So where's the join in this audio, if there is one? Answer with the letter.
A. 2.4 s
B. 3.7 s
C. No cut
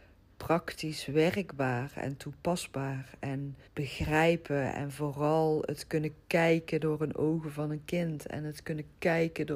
B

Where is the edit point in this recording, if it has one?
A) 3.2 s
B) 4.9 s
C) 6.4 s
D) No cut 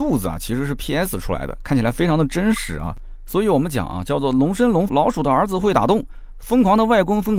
B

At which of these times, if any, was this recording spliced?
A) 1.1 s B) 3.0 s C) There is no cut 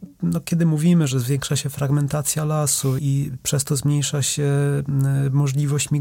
B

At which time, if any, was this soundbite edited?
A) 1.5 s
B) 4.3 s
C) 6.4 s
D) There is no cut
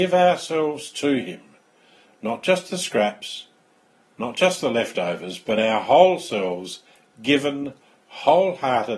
D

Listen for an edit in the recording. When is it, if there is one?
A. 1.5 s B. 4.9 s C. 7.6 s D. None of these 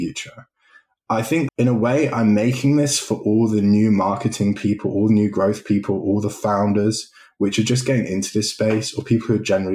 A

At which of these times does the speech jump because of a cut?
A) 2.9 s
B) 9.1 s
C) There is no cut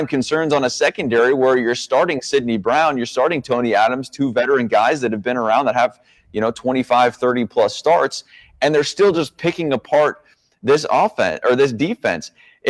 C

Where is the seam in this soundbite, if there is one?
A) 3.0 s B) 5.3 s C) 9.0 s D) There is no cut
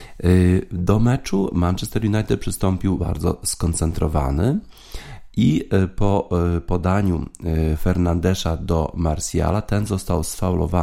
A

